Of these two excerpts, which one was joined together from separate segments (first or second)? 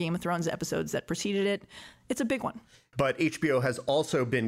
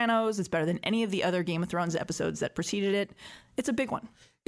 first